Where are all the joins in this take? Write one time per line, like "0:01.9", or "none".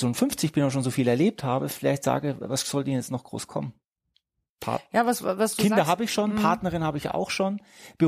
none